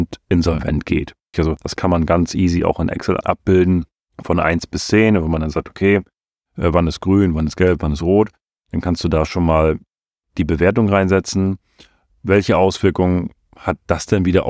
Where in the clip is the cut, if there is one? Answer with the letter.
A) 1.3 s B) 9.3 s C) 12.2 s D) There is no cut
A